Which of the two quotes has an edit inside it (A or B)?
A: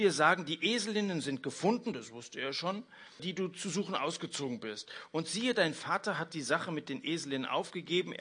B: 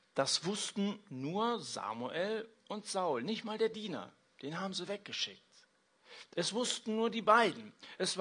A